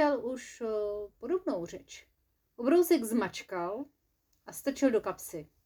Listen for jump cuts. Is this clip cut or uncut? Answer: cut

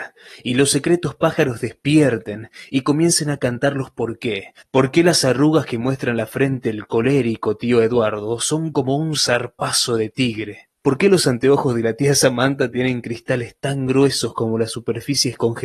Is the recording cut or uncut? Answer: cut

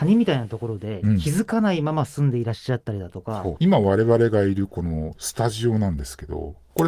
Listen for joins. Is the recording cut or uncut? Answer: cut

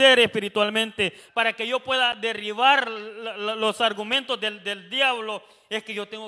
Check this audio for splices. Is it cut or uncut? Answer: cut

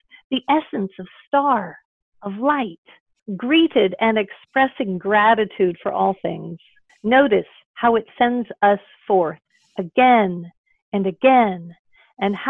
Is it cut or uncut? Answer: cut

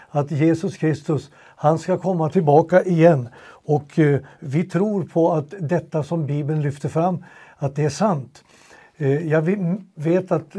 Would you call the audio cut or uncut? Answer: uncut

